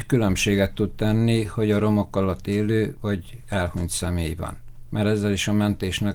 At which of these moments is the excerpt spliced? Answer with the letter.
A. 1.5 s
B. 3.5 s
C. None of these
C